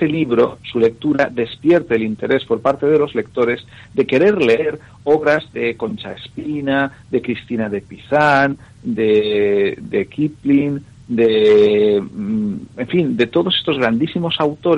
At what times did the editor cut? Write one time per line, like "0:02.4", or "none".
none